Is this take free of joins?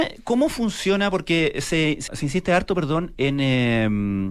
no; 1 cut; at 2.1 s

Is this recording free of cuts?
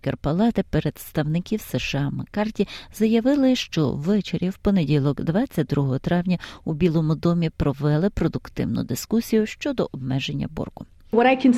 yes; 0 cuts

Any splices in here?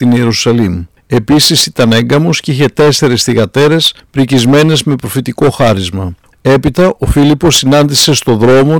yes; 1 cut; at 6.3 s

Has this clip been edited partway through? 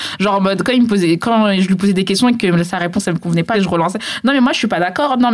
yes; 1 cut; at 3.5 s

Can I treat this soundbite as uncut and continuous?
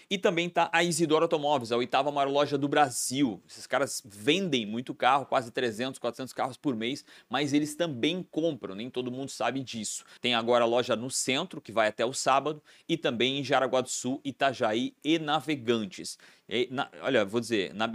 no; 1 cut; at 10.2 s

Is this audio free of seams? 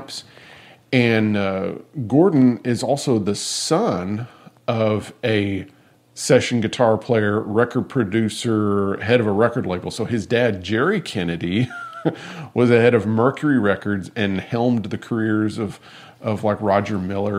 yes; 0 cuts

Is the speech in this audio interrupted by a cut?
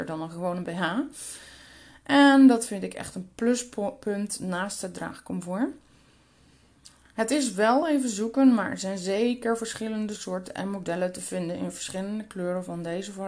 no; 0 cuts

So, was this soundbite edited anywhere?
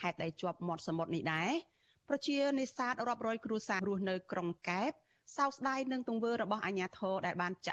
yes; 1 cut; at 3.8 s

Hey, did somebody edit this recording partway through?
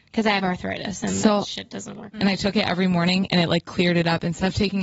yes; 1 cut; at 2.1 s

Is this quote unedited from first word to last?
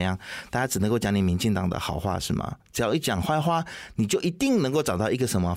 yes; 0 cuts

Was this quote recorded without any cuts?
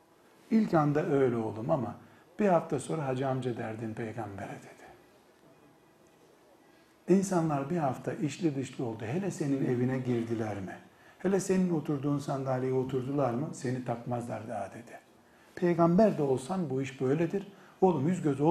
yes; 0 cuts

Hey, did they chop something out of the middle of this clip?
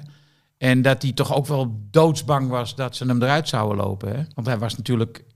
yes; 1 cut; at 4.3 s

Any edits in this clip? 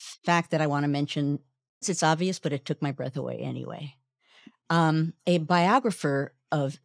yes; 2 cuts; at 1.8 s, 5.2 s

